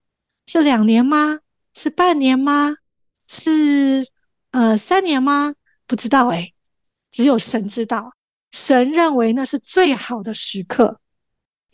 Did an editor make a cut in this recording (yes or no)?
no